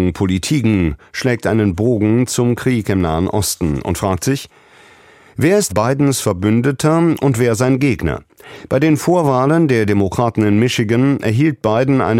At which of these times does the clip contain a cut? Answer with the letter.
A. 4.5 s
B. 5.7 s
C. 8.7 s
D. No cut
B